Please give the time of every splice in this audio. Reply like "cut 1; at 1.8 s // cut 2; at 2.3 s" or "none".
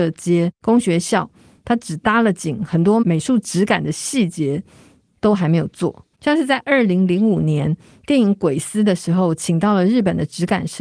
cut 1; at 6.1 s